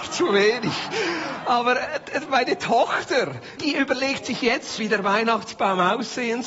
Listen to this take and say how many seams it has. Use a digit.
2